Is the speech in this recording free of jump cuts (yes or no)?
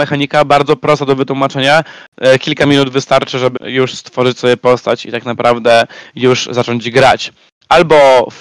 no